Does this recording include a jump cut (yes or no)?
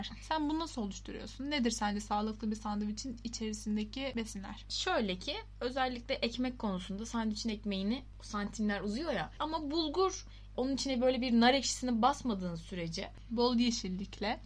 yes